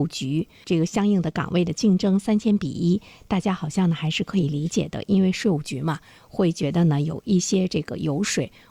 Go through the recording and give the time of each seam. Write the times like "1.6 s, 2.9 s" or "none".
none